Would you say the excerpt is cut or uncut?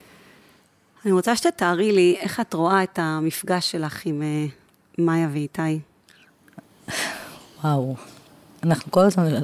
uncut